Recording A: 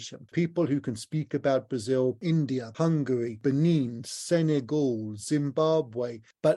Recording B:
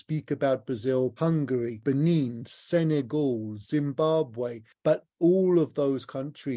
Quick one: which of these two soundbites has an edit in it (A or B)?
B